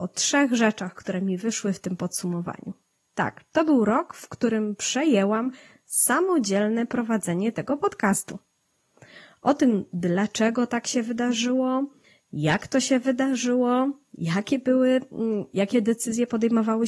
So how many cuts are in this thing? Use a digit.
1